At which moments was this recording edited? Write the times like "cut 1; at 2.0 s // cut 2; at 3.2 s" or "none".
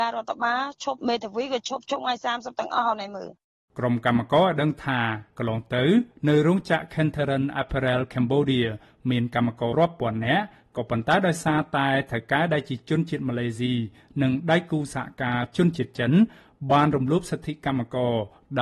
cut 1; at 9.7 s